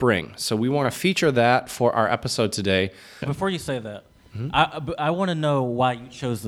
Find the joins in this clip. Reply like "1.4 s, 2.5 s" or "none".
3.2 s